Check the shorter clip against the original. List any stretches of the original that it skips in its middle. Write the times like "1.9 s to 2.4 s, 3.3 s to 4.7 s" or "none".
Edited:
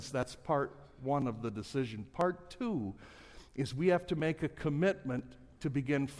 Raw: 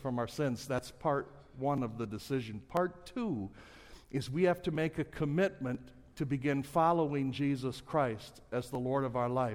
none

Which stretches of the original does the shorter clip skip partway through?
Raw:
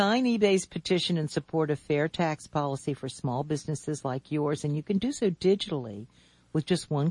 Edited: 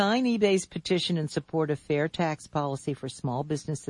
none

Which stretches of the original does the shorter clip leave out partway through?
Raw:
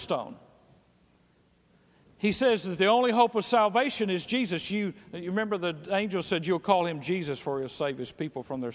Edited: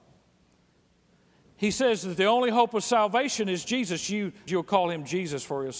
5.1 s to 6.4 s

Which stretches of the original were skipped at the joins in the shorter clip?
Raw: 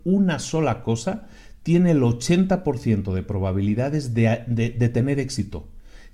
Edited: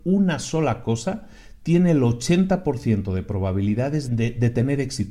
4.1 s to 4.4 s

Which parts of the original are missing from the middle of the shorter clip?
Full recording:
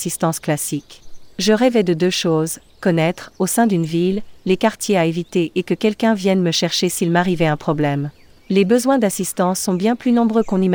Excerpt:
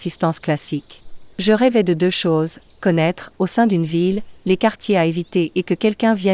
none

